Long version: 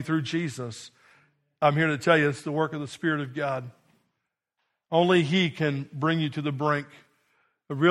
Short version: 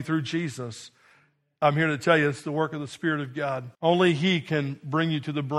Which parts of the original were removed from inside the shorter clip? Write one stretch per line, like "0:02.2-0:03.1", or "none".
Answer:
0:03.7-0:04.8